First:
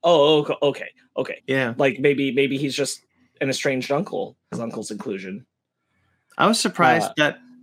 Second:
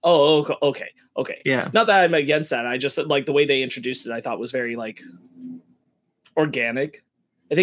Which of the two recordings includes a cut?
first; 2 cuts; at 1.4 s, 4.5 s

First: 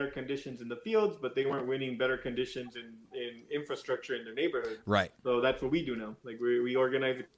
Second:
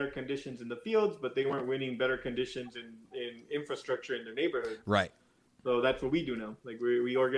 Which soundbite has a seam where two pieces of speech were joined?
first; 1 cut; at 5.1 s

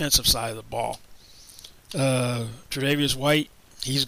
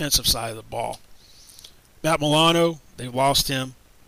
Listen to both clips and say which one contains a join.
first; 1 cut; at 1.9 s

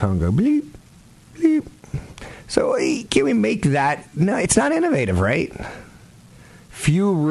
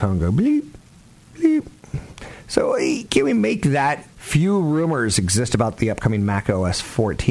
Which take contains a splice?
second; 1 cut; at 4.1 s

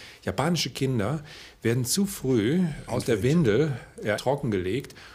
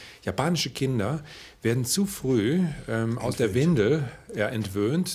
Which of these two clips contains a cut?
first; 2 cuts; at 2.9 s, 4.2 s

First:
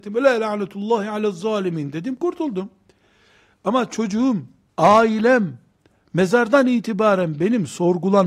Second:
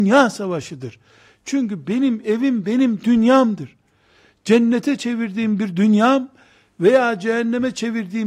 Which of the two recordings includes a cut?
first; 1 cut; at 4.7 s

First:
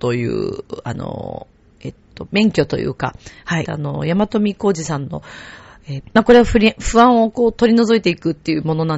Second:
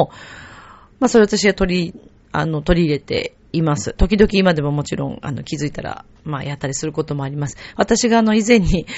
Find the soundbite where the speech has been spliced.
first; 3 cuts; at 2.3 s, 3.7 s, 6.0 s

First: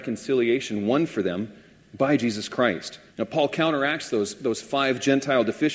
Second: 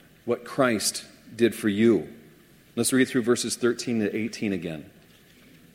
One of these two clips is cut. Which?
first; 1 cut; at 3.1 s

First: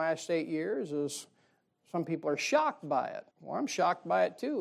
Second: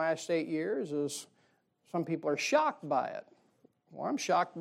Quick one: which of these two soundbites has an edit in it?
first; 1 cut; at 3.3 s

